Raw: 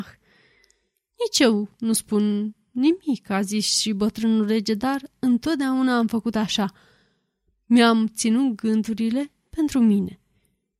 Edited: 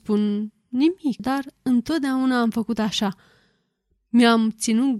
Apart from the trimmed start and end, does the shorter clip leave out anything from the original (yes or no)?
yes